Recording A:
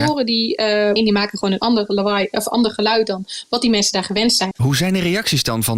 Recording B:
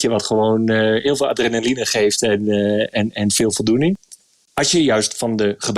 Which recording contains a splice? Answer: A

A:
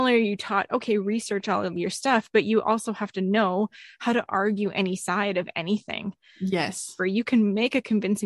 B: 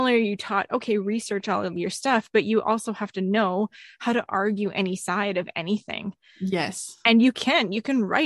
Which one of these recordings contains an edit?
A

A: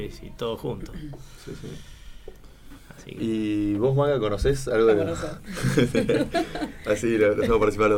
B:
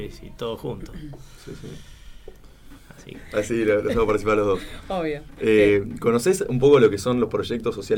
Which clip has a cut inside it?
B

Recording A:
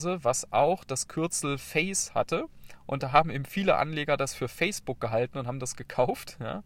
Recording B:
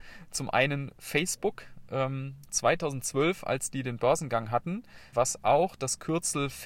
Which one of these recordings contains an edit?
B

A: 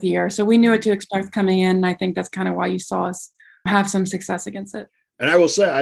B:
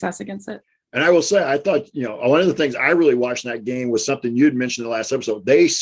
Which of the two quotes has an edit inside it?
A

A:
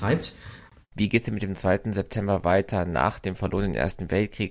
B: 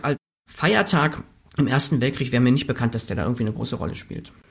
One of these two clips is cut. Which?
A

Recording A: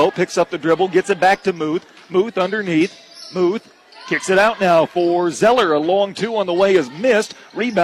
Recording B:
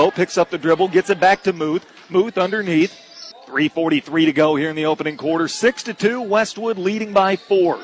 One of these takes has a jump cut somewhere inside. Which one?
B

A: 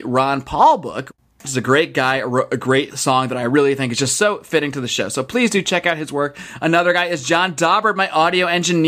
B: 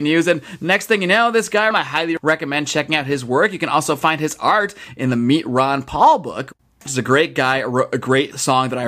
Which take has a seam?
B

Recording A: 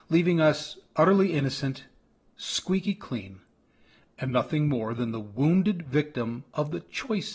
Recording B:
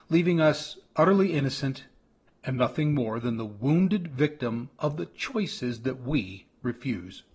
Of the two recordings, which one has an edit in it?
B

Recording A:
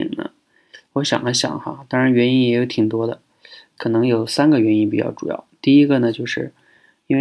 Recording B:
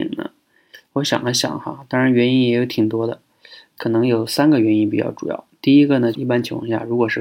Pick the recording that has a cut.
B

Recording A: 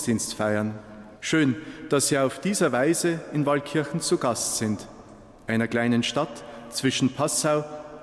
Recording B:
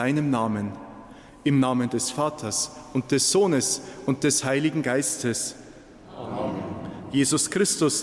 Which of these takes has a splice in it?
A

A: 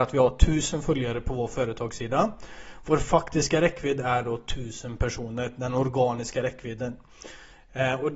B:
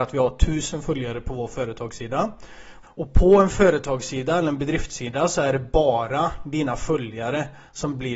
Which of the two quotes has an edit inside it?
B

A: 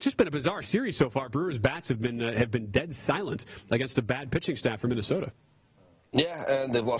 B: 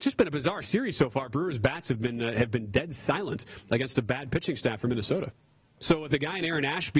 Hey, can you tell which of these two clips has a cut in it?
B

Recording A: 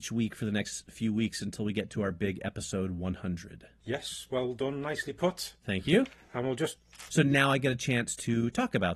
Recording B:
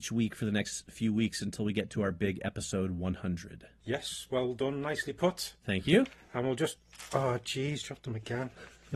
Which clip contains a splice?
A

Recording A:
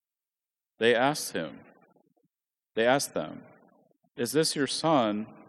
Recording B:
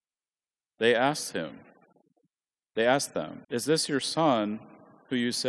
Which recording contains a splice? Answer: B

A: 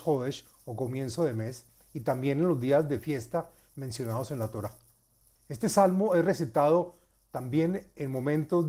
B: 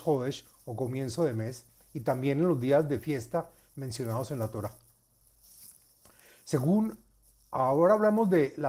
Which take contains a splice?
A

